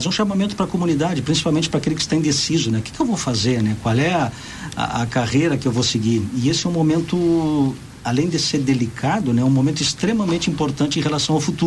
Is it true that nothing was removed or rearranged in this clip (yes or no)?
yes